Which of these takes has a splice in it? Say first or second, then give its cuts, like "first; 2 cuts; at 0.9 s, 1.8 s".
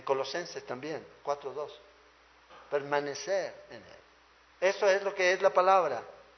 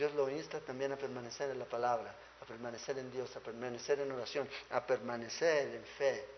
first; 1 cut; at 4.5 s